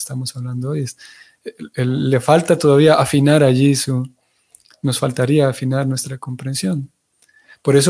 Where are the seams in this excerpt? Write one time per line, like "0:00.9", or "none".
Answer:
none